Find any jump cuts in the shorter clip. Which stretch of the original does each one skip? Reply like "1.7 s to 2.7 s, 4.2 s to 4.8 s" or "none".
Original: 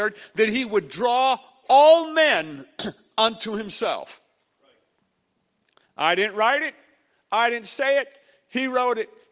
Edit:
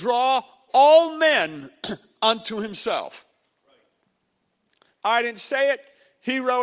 5.9 s to 7.2 s